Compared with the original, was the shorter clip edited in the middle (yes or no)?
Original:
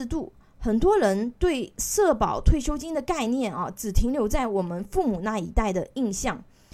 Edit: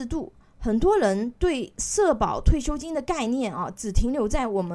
no